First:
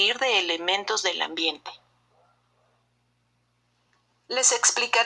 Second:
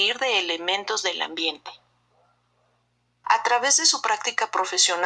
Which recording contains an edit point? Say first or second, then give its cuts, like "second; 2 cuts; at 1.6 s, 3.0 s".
second; 1 cut; at 3.2 s